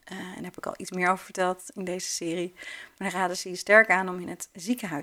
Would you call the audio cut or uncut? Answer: uncut